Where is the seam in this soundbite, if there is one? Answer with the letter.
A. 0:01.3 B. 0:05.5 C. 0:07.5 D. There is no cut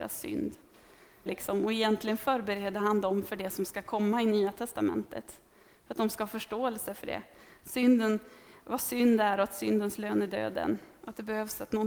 A